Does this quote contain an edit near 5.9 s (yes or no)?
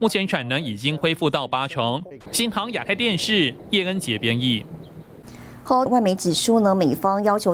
yes